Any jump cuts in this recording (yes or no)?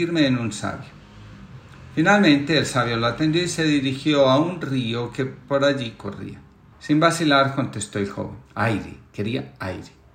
yes